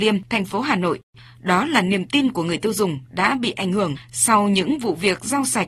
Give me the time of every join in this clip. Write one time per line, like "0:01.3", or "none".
none